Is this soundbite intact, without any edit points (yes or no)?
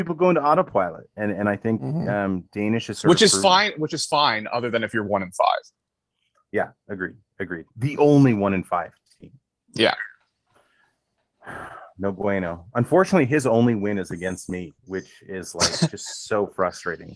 no